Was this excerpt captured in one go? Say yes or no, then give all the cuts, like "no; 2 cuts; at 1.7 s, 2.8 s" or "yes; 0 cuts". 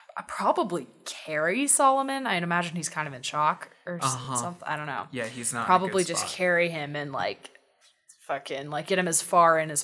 yes; 0 cuts